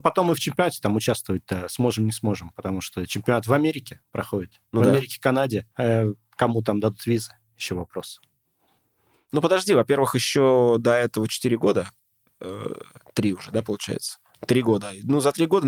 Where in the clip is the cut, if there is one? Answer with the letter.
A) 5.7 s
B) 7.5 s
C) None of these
A